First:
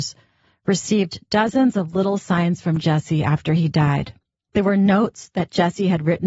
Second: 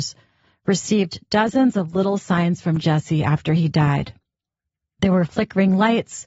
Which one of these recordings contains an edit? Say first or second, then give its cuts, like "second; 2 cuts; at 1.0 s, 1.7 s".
first; 1 cut; at 4.5 s